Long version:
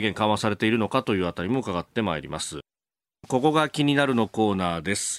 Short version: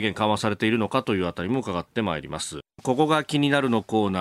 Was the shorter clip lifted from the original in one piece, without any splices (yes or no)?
no